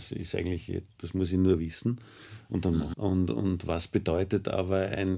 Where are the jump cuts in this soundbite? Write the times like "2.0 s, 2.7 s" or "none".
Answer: 2.9 s